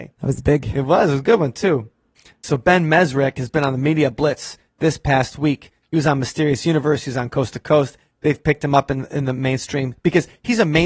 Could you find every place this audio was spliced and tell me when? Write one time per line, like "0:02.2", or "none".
none